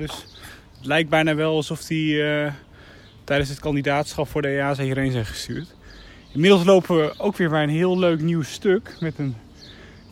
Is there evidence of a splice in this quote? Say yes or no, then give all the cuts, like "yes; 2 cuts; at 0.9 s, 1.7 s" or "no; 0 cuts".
no; 0 cuts